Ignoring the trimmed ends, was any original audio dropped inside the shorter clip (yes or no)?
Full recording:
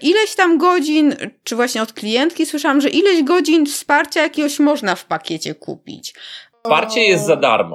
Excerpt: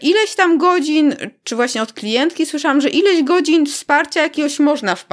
no